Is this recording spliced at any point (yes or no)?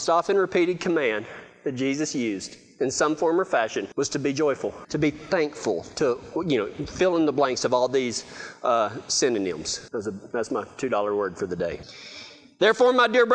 no